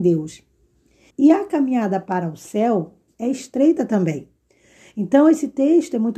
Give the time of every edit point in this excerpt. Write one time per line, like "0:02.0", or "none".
0:01.1